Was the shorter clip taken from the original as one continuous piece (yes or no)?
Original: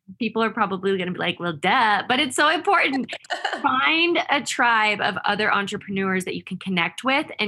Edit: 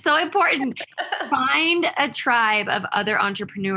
yes